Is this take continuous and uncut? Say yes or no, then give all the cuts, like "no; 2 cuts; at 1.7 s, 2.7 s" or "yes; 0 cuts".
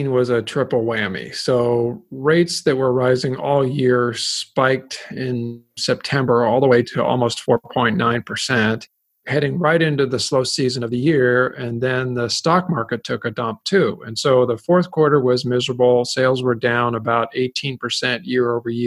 yes; 0 cuts